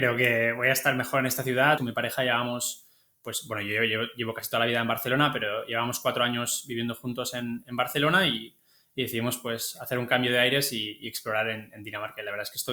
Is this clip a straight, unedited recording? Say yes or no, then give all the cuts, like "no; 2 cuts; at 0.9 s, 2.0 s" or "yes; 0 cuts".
no; 1 cut; at 1.8 s